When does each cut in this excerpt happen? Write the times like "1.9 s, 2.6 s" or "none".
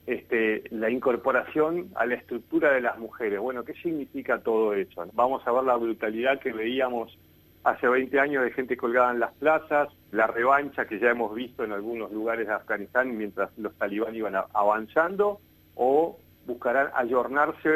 5.1 s, 10.1 s